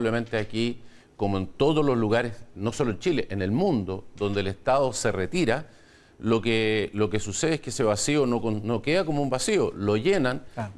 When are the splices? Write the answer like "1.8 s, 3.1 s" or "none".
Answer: none